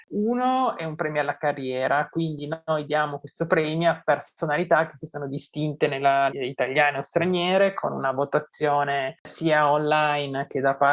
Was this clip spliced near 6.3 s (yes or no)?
yes